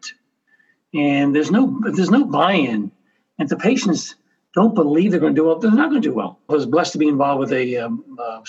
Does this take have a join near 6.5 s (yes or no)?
yes